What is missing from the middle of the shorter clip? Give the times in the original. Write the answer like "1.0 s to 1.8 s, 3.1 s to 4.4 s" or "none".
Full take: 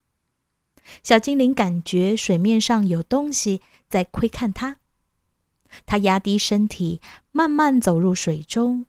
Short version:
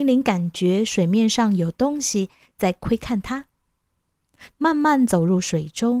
5.8 s to 7.3 s